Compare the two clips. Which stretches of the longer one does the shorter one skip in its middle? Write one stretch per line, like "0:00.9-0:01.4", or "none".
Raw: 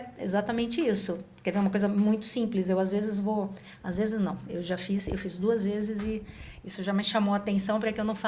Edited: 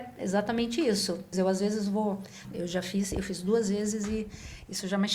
0:01.3-0:02.6
0:03.8-0:04.4